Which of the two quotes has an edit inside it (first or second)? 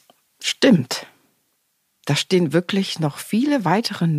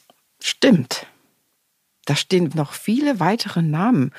second